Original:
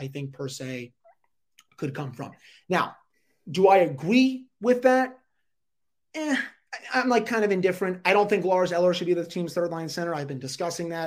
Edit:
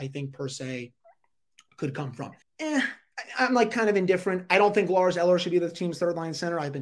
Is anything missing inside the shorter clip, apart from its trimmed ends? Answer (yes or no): yes